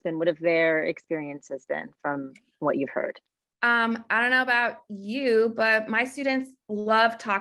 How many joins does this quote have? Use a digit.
1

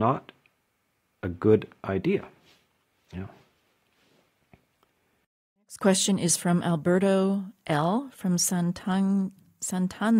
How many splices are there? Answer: 0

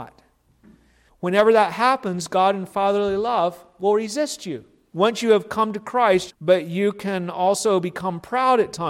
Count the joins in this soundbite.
3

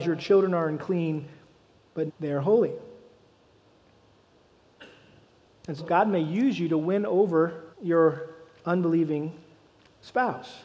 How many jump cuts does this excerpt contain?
3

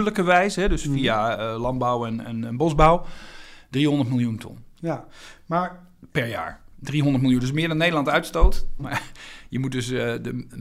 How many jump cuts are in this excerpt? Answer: 1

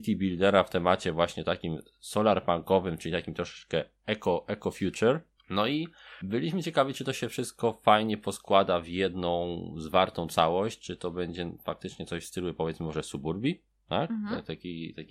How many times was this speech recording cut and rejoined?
0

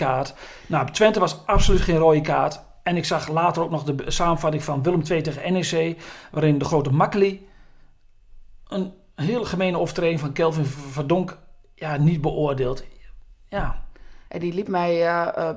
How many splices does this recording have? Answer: 1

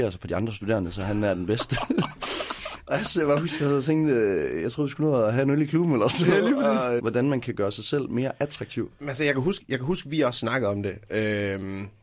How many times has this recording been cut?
1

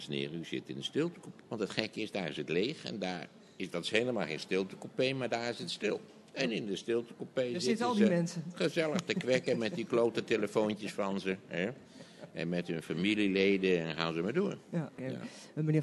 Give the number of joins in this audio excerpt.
1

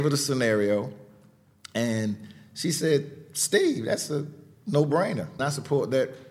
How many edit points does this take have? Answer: 1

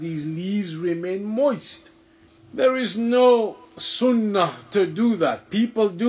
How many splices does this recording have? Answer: 2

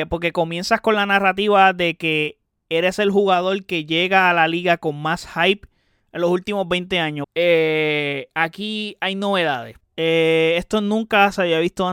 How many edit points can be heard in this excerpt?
2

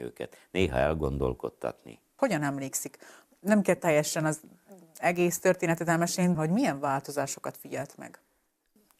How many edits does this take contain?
2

